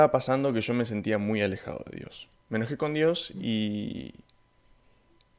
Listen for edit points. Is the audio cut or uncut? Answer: cut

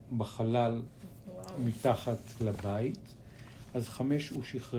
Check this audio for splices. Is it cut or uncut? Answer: uncut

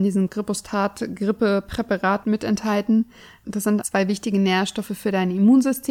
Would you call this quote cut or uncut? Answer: cut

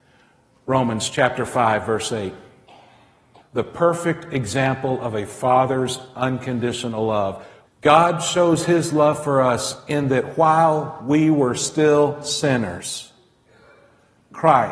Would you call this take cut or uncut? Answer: cut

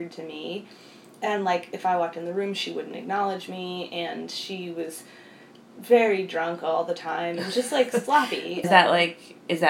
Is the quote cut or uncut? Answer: cut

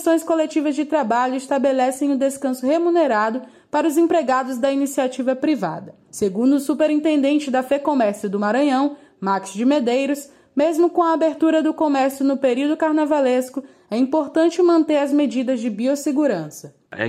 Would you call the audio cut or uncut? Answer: uncut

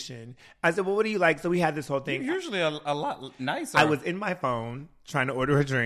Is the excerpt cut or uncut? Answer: uncut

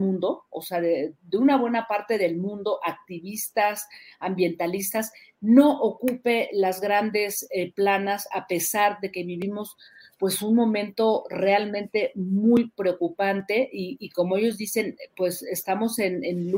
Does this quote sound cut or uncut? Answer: uncut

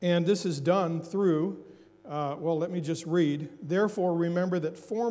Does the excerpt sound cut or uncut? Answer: uncut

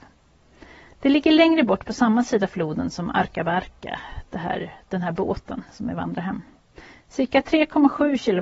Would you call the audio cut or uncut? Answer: uncut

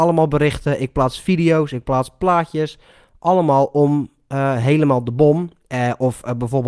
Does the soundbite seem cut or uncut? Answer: uncut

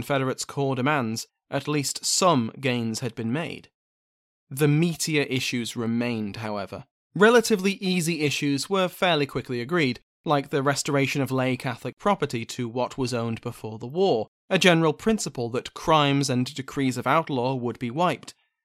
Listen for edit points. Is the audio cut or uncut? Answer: cut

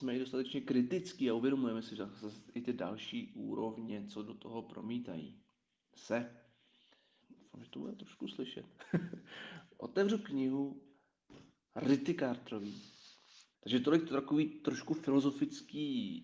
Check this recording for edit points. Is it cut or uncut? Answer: cut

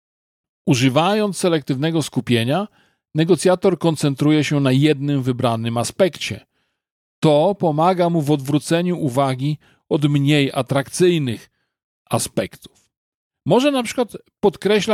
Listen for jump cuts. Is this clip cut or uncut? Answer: uncut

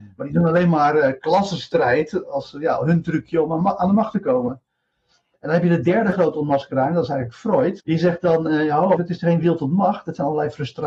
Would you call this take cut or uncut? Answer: cut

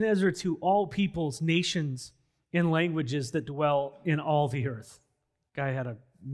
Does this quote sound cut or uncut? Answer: uncut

